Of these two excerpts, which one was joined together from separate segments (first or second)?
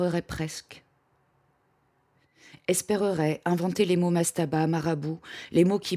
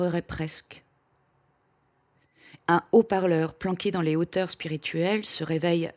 second